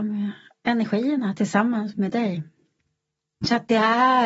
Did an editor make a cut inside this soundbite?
no; 0 cuts

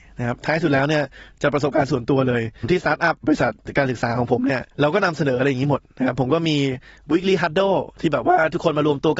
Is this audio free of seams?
no; 1 cut; at 4.7 s

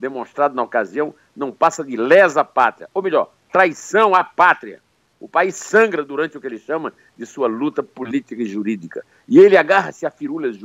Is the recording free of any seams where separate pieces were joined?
yes; 0 cuts

